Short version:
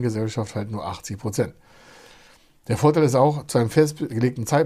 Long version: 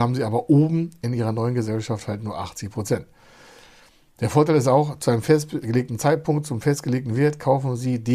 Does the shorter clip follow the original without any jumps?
yes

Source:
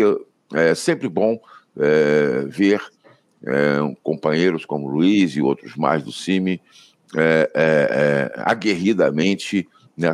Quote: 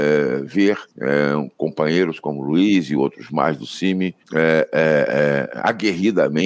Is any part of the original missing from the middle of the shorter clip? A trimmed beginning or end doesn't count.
yes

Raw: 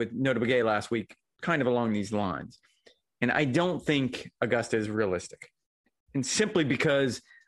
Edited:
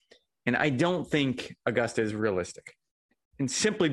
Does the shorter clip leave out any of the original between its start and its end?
no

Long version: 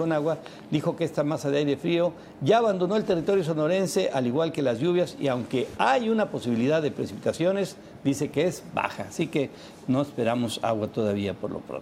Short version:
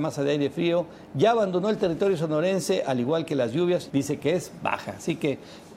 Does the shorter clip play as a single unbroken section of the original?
no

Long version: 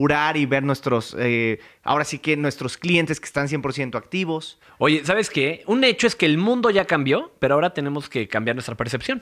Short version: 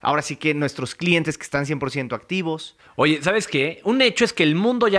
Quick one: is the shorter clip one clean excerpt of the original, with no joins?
yes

